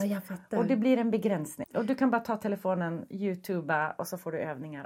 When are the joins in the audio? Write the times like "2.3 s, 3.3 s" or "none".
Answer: 1.6 s